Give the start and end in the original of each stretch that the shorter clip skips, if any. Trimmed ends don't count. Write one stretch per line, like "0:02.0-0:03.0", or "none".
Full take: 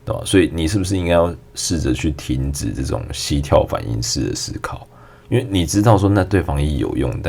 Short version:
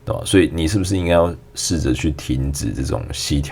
none